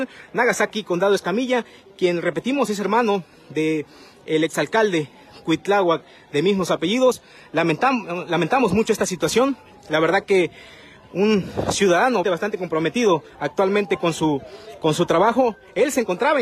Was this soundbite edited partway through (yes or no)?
yes